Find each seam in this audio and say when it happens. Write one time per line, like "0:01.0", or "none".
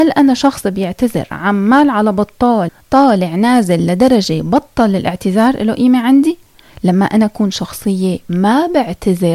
0:06.7